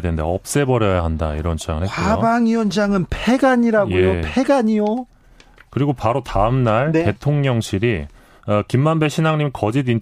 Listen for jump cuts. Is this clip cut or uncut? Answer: uncut